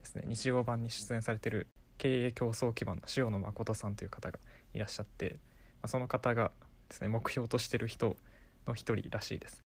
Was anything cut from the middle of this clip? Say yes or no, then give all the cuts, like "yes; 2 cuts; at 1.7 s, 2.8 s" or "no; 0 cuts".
no; 0 cuts